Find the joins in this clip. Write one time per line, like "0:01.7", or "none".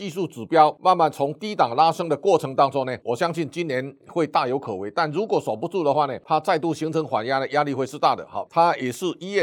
0:03.0
0:08.5